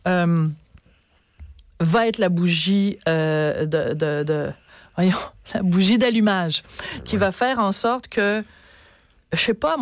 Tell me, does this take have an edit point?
no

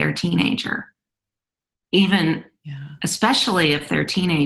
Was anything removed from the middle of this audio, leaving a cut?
no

